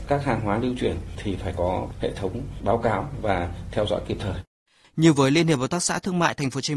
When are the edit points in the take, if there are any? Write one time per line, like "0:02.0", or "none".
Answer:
0:04.8